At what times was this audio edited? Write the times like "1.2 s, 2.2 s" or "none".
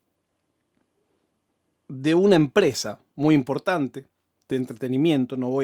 none